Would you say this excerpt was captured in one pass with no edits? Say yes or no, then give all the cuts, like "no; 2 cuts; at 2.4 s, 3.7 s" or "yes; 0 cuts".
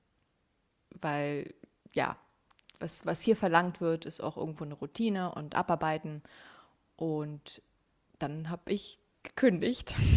yes; 0 cuts